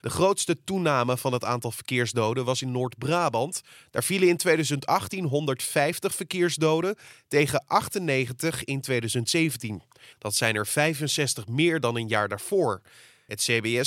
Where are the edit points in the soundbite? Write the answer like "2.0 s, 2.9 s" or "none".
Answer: 10.1 s